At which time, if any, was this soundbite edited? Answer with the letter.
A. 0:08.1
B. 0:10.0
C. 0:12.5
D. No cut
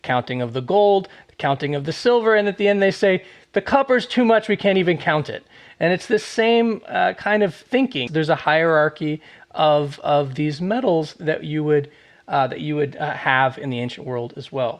A